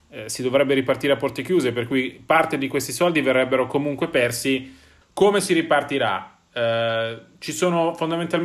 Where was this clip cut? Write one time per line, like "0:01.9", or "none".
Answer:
0:05.0

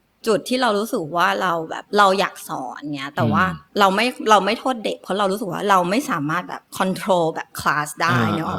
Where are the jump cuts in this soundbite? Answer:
0:03.7
0:06.7

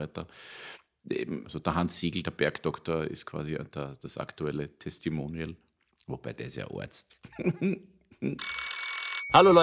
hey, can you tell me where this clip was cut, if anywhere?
0:01.4

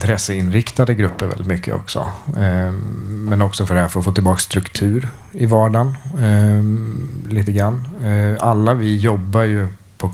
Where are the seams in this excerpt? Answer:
none

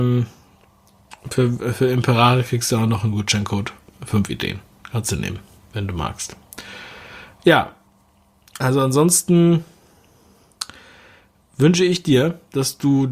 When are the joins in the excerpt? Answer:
none

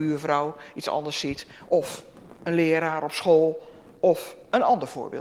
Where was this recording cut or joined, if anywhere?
0:01.7

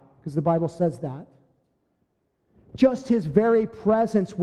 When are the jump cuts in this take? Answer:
none

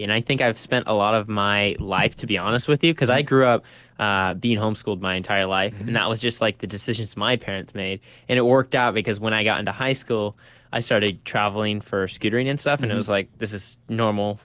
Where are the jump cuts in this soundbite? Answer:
none

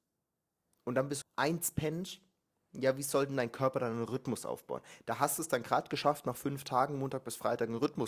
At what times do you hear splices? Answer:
0:01.2

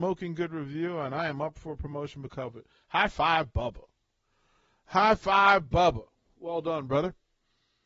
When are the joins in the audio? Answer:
none

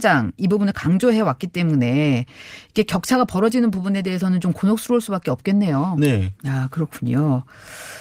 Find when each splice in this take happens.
0:06.4

